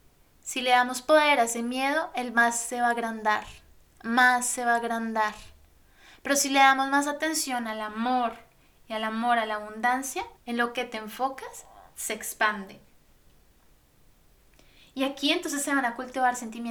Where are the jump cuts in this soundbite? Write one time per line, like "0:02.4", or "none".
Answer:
0:10.4